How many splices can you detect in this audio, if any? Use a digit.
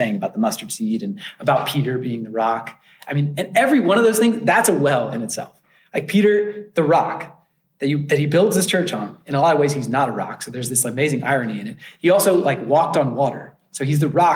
0